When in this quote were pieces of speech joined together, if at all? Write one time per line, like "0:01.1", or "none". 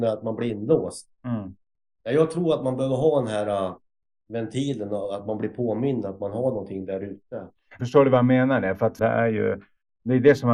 0:07.8
0:09.0

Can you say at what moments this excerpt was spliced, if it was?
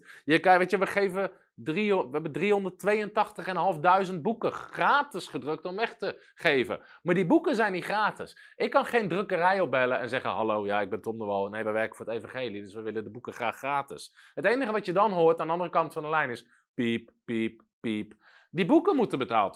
none

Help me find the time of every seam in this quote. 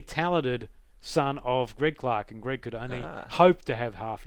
none

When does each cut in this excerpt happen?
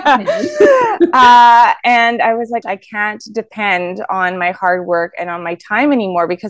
0:02.6

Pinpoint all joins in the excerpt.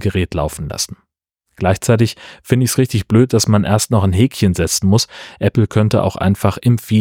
none

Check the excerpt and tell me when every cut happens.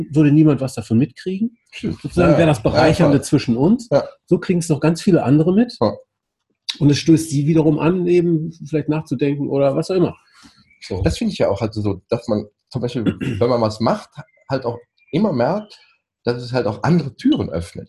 none

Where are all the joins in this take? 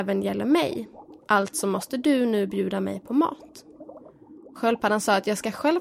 none

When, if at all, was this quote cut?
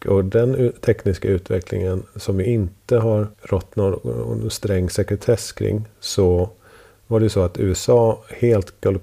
0:03.3

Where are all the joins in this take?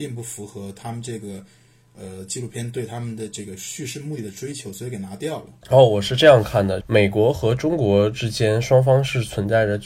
0:05.6
0:06.8

